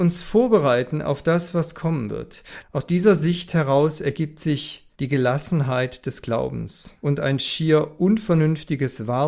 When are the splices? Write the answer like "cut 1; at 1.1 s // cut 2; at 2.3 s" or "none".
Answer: cut 1; at 2.6 s // cut 2; at 4.9 s // cut 3; at 7.0 s